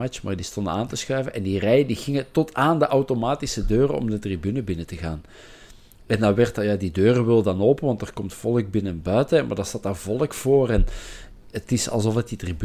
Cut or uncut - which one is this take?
uncut